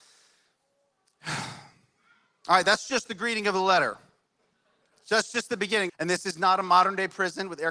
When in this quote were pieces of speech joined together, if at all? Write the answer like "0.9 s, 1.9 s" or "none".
5.9 s